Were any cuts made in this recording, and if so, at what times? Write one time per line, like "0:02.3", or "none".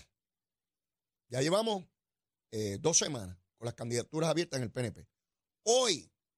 0:01.2